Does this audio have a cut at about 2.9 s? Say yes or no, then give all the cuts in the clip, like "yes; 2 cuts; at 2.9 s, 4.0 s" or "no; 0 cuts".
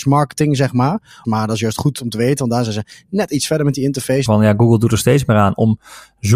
no; 2 cuts; at 1.2 s, 4.3 s